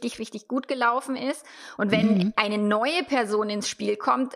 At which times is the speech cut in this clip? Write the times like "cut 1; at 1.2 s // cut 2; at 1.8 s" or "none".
cut 1; at 1.8 s